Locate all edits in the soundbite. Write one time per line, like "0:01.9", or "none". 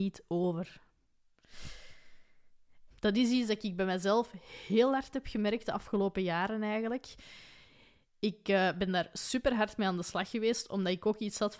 0:02.9